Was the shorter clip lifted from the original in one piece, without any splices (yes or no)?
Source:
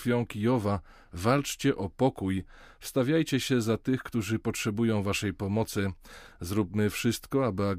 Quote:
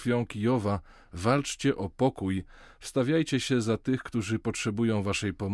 yes